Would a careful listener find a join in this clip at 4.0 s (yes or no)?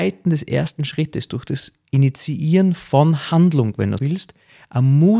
yes